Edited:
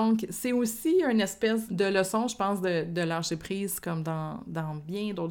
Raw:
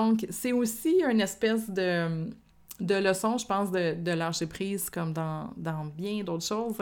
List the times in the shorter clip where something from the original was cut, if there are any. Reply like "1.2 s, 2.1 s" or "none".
1.7 s